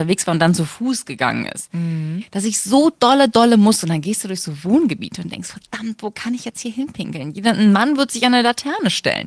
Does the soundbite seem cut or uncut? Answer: uncut